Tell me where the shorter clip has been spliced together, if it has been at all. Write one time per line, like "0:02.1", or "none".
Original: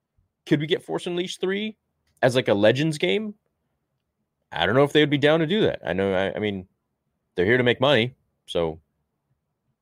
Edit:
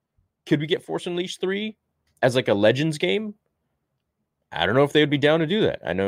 none